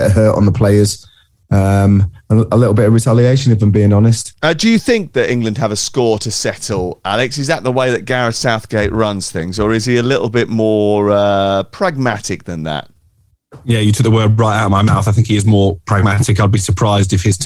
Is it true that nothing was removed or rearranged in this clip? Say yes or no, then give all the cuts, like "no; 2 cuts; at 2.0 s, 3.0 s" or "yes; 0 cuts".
yes; 0 cuts